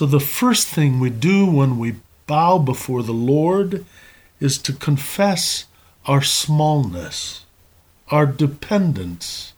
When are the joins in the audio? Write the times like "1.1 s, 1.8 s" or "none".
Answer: none